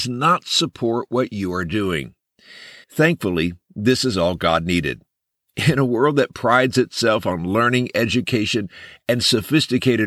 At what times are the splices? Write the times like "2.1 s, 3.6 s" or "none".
2.8 s